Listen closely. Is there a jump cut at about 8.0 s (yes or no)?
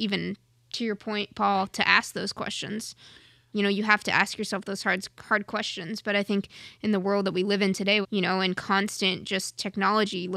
yes